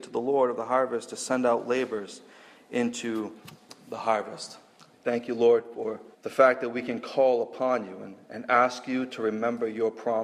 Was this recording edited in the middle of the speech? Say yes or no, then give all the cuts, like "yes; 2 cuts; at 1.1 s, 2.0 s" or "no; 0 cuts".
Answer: yes; 2 cuts; at 4.9 s, 6.1 s